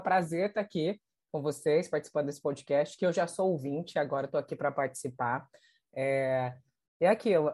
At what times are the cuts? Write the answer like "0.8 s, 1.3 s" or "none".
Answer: none